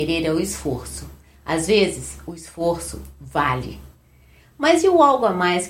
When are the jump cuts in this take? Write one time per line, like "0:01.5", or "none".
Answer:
none